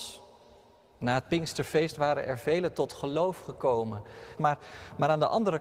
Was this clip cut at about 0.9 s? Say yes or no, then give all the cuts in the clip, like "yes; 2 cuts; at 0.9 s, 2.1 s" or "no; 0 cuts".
no; 1 cut; at 4.4 s